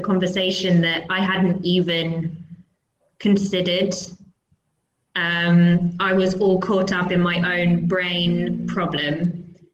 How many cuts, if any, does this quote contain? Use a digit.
0